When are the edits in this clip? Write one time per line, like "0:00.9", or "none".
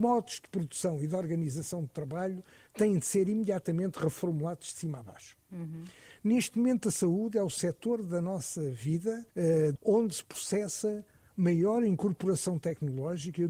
0:09.8

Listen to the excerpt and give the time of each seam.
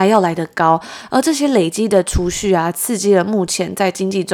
none

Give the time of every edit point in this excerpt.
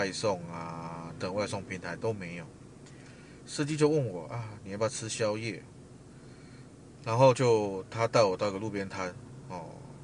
0:01.2
0:07.0

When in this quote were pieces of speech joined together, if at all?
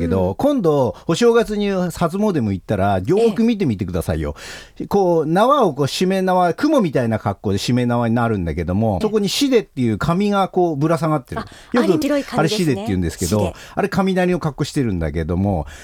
0:09.0
0:12.0

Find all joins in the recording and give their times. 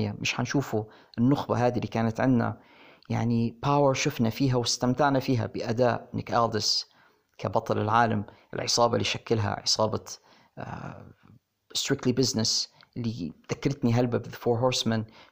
none

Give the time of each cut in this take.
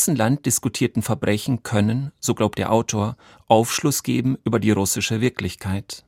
none

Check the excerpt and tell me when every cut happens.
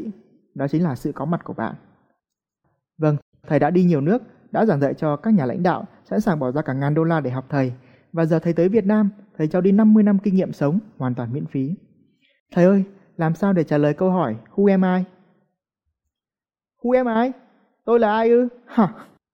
0:12.5

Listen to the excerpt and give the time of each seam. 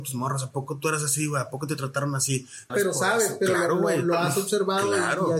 0:02.7

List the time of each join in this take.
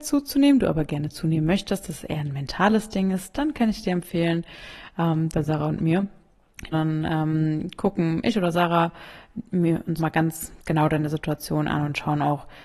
0:05.3
0:06.7
0:10.0

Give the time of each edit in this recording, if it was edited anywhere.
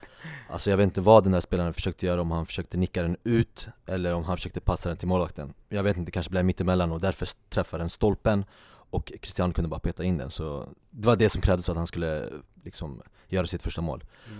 0:10.8

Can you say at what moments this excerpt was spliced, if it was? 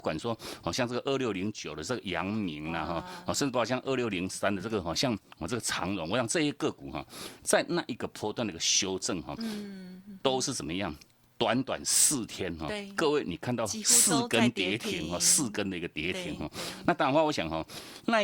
none

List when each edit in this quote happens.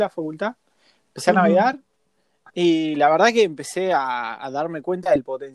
none

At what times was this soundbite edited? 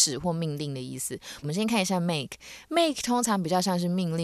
0:01.4

